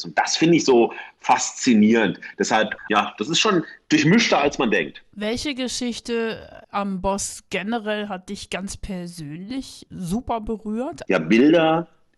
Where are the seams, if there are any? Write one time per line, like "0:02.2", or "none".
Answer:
0:11.0

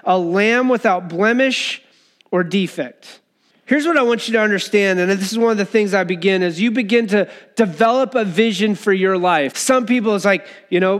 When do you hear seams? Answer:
0:03.5
0:09.5

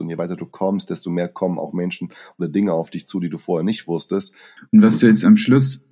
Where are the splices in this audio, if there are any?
0:04.6

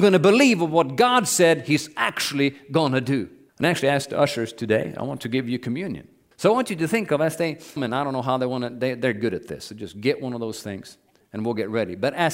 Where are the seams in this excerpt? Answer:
0:03.5
0:06.3
0:07.8

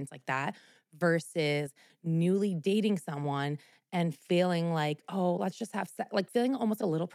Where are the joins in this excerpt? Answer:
none

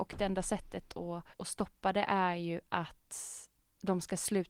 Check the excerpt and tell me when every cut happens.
0:01.3

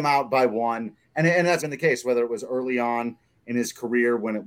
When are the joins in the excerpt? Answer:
0:01.6

